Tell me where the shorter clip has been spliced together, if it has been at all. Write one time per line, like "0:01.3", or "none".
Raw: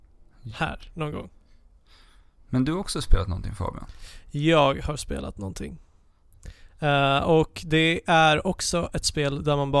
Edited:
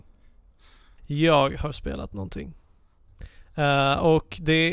0:01.0